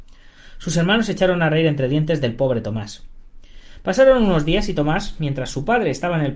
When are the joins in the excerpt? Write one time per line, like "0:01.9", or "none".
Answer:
none